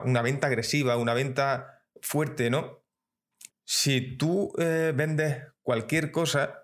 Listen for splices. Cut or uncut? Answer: cut